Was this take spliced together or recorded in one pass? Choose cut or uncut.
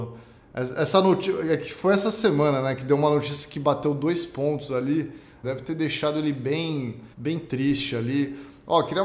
cut